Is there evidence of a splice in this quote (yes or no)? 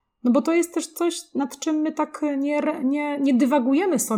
no